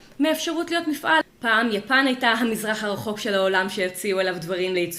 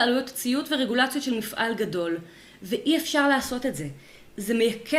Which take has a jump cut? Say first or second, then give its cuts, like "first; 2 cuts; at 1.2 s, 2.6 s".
first; 1 cut; at 1.2 s